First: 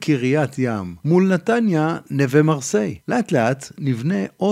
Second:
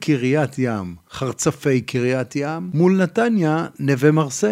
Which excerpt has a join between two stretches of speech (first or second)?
first